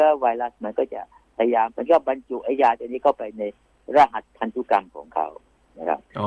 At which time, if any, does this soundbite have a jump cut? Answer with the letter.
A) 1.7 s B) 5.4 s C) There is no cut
A